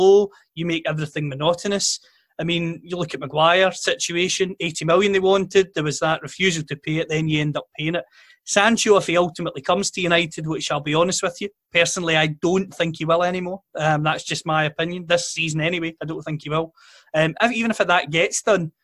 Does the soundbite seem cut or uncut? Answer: uncut